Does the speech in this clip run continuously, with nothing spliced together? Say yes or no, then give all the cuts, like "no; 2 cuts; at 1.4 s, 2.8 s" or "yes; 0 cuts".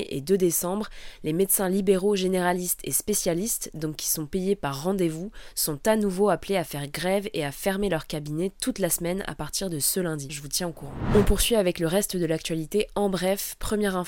no; 1 cut; at 10.3 s